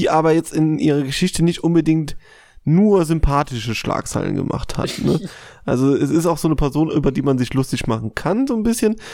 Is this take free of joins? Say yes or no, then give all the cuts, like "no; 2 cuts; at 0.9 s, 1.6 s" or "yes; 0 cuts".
yes; 0 cuts